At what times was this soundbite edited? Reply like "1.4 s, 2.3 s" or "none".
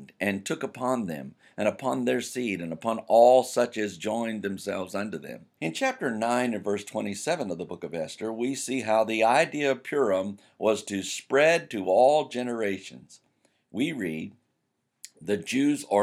5.6 s